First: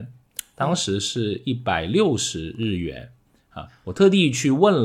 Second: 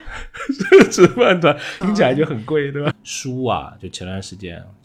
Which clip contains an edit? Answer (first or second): second